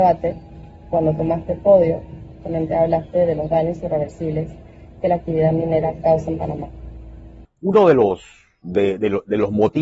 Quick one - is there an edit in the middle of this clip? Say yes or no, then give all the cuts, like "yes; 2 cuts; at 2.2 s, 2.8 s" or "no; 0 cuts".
yes; 1 cut; at 7.4 s